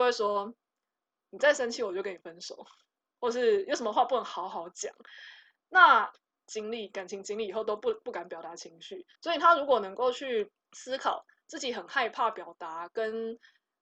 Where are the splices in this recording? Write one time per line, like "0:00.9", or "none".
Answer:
0:06.4
0:09.1
0:10.6